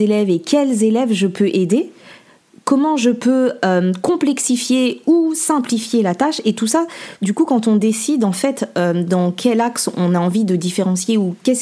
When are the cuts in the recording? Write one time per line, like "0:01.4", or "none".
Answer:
none